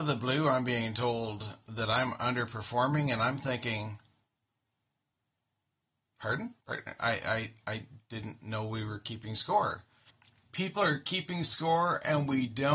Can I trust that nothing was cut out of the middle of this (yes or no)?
no